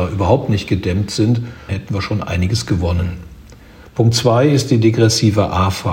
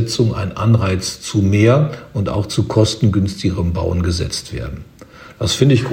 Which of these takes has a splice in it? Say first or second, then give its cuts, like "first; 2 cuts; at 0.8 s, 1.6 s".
first; 2 cuts; at 1.7 s, 3.8 s